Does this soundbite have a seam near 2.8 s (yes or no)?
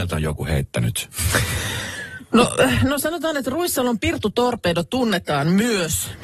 no